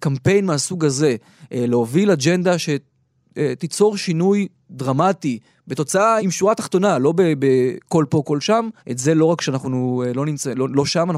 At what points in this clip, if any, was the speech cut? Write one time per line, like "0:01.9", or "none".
0:06.2
0:08.8